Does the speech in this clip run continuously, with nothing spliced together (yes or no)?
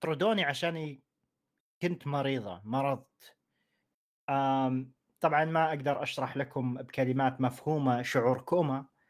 yes